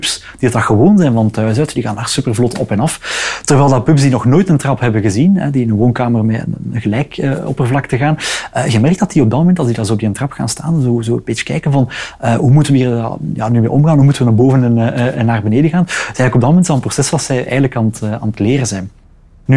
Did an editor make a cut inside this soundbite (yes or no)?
no